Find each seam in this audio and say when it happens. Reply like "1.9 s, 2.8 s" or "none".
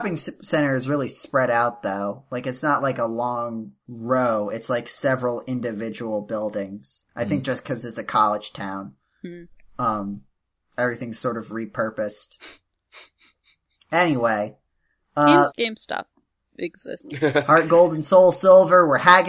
15.5 s, 17.1 s